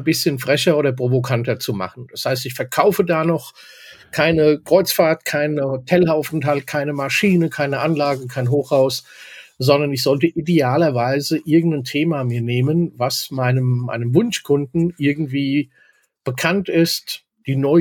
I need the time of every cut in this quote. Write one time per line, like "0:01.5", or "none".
none